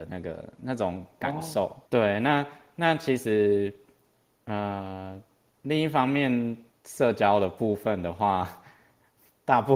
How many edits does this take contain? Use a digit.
2